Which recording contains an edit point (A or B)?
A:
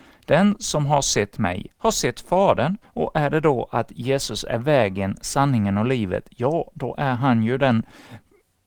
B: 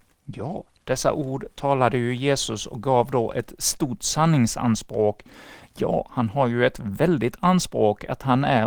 A